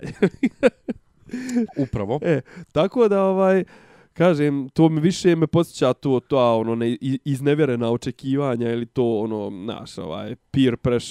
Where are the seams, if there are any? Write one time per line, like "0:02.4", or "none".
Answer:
none